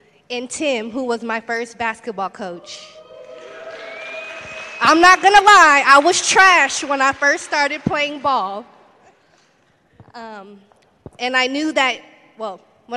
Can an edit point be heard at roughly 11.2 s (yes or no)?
yes